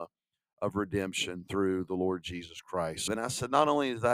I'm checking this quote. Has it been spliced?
yes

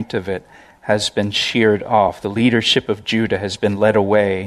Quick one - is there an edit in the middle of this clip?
no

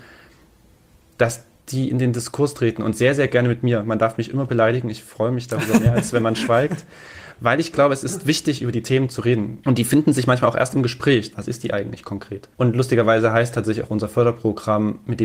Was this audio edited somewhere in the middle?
yes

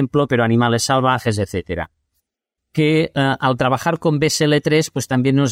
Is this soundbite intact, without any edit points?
no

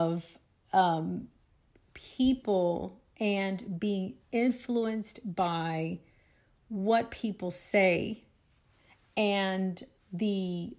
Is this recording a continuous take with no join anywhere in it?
yes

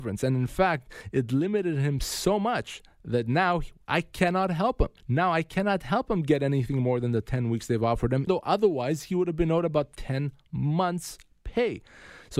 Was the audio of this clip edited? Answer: yes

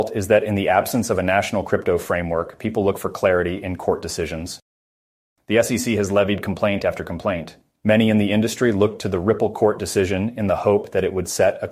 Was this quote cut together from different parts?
no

